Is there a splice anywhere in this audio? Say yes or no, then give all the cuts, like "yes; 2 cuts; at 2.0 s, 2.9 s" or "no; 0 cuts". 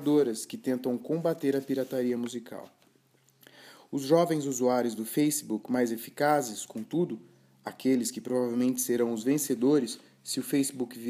no; 0 cuts